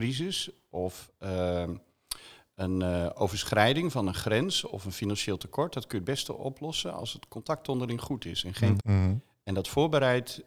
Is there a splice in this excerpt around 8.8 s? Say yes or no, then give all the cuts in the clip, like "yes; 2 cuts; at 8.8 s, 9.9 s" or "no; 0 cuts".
yes; 1 cut; at 8.8 s